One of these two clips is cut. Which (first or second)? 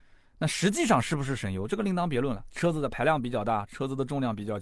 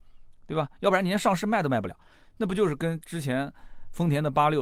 first